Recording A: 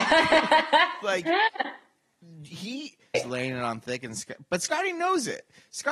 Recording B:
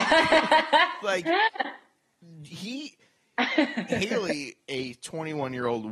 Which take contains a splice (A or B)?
A